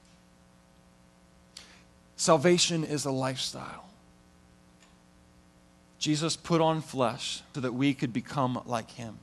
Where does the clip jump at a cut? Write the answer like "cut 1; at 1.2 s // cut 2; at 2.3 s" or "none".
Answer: cut 1; at 7.5 s